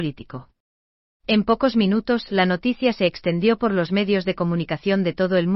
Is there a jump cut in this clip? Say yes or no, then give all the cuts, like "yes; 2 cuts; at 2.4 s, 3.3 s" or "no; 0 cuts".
yes; 1 cut; at 1.2 s